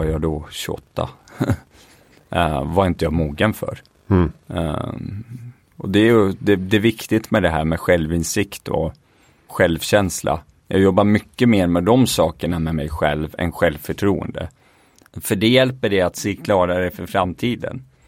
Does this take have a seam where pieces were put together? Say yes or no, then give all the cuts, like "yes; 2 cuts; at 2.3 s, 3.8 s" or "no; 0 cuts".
yes; 2 cuts; at 9.5 s, 15.1 s